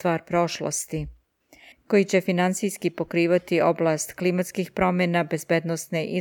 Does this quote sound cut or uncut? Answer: cut